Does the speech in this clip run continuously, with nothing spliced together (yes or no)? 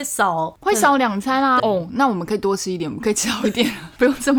no